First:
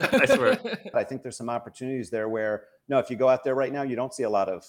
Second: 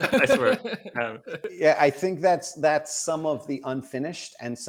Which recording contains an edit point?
first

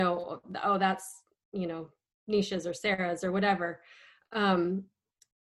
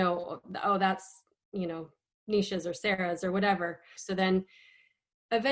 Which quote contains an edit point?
second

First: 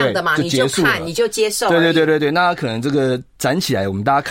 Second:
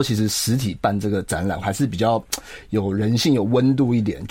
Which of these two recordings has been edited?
second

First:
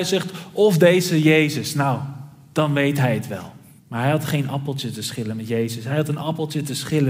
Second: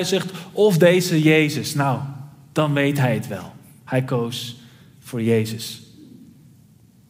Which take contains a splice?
first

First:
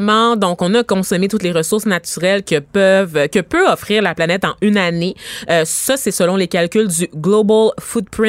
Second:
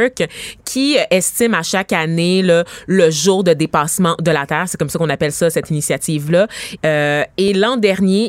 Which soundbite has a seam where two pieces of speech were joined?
second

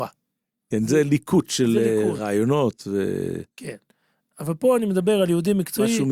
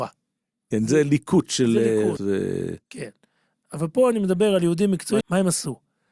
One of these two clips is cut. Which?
second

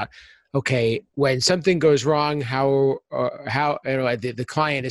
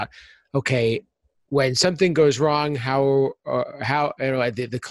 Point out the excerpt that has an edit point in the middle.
first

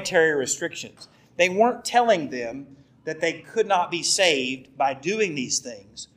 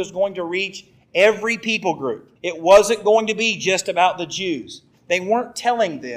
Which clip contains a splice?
second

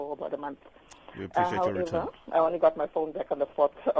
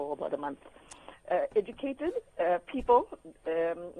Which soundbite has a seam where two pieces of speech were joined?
second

